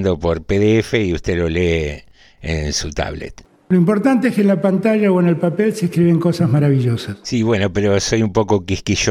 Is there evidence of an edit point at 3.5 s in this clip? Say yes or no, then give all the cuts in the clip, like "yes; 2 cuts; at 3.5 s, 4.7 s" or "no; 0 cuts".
no; 1 cut; at 7.2 s